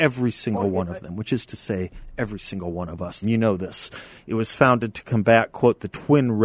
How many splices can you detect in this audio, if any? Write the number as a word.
one